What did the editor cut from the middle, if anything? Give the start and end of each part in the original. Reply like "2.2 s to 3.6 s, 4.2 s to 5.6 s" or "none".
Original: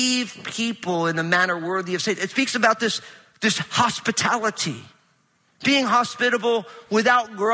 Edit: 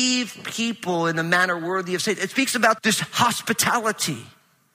2.8 s to 3.4 s